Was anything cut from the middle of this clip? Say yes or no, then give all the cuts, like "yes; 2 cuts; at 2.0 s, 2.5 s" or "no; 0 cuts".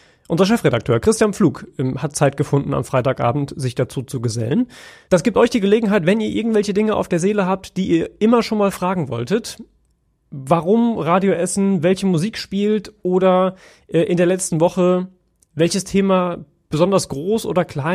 no; 0 cuts